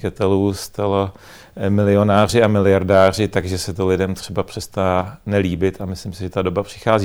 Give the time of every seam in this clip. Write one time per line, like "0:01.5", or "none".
none